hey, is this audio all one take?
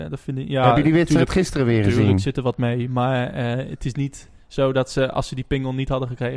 yes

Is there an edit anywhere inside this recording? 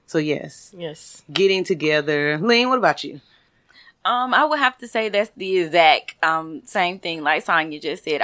no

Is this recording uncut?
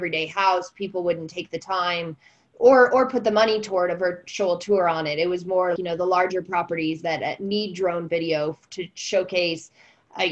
no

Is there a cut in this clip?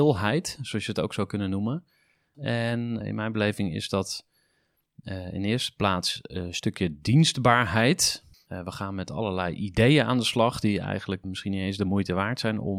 yes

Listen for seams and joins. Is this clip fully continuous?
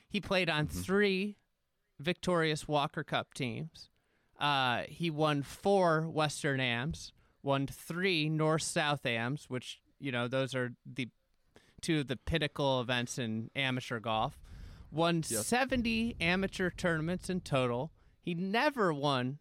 yes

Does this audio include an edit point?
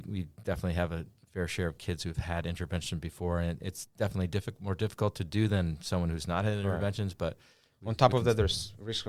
no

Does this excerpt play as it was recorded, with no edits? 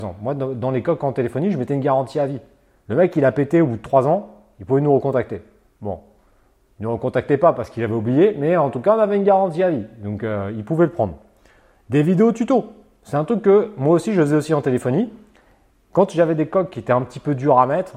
yes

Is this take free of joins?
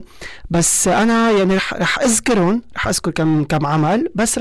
yes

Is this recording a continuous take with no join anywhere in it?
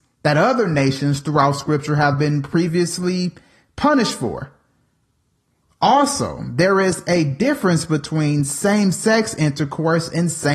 yes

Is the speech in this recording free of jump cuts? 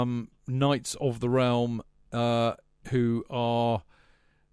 yes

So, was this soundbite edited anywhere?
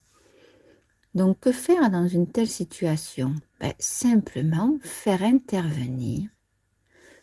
yes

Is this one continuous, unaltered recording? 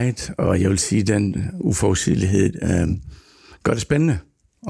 yes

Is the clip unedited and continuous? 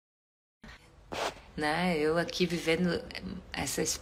no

